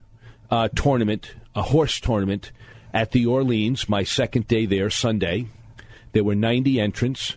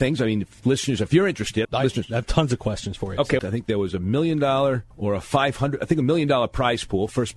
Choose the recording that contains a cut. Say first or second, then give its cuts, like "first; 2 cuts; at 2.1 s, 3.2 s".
second; 3 cuts; at 1.6 s, 3.4 s, 4.9 s